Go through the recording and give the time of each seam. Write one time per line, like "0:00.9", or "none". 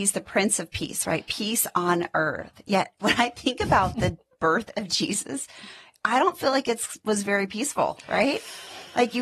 0:03.0